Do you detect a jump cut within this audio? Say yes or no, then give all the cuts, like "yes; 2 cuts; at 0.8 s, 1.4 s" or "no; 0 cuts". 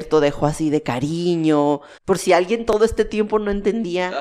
yes; 1 cut; at 2.0 s